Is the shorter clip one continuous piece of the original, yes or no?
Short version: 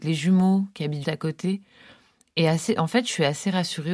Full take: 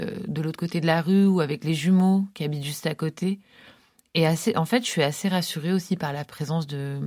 no